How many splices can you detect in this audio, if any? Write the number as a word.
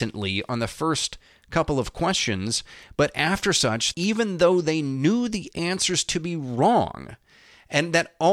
one